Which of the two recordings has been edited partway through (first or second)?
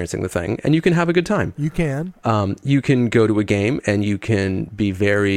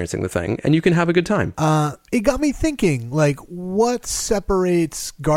second